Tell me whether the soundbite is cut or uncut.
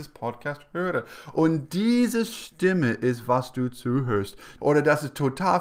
cut